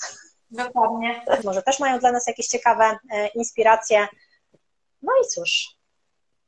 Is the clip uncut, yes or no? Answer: no